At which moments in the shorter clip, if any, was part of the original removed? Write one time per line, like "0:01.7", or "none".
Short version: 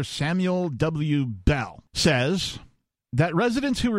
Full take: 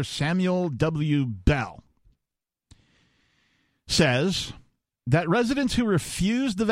0:01.9